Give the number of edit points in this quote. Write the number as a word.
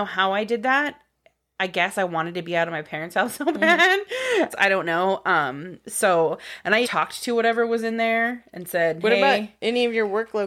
two